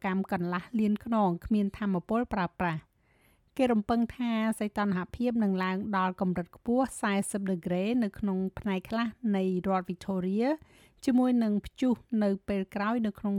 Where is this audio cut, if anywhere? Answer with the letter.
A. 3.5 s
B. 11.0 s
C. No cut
C